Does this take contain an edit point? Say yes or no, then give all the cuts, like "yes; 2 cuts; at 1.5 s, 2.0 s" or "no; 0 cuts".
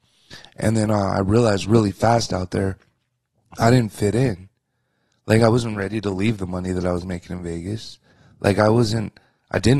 no; 0 cuts